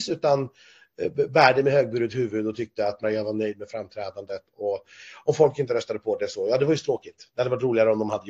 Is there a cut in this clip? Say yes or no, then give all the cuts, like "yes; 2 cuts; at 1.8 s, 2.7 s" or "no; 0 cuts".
yes; 1 cut; at 3.0 s